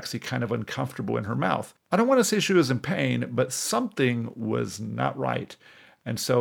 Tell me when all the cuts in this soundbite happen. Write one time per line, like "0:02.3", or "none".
none

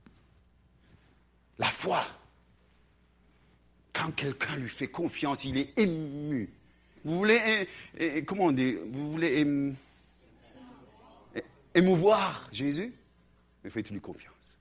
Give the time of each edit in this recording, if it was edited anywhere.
0:07.0

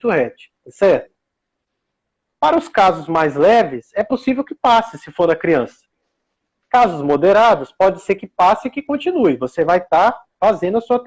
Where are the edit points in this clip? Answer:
none

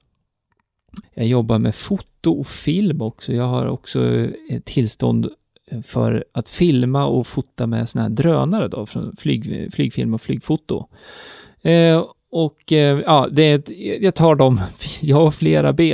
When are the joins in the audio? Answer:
0:01.0

